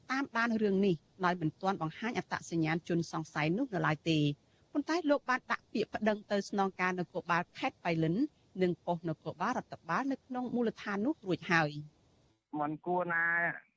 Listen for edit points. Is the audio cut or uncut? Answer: uncut